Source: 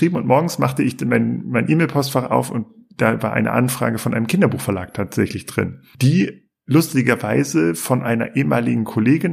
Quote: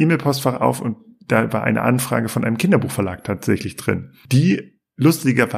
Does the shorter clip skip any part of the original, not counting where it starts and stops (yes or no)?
no